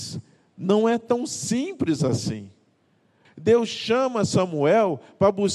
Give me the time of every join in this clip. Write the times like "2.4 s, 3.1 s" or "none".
3.2 s